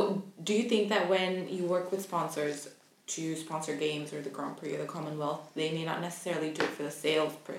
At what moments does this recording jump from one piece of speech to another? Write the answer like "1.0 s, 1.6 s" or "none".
none